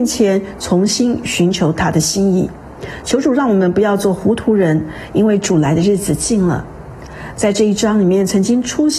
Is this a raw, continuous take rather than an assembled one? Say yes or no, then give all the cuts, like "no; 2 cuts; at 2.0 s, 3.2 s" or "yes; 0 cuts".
yes; 0 cuts